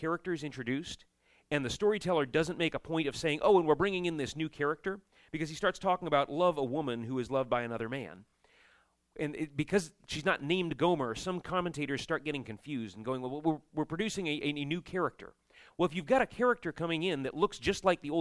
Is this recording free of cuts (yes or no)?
yes